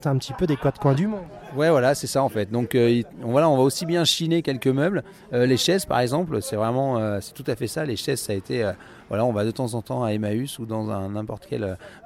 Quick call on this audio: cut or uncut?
uncut